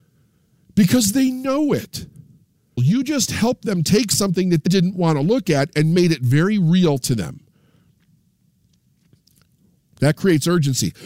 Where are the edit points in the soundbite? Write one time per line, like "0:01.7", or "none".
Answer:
0:02.8
0:04.7